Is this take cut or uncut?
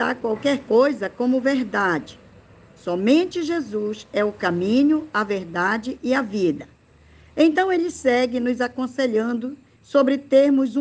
uncut